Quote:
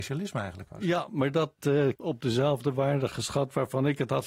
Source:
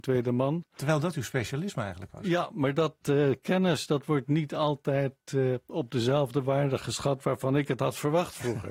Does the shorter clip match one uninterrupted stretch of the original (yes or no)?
no